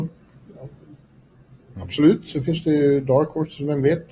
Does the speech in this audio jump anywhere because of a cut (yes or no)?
no